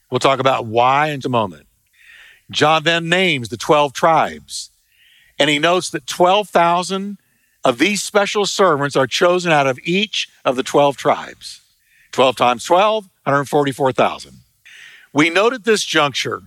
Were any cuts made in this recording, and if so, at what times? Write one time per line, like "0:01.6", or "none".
0:01.2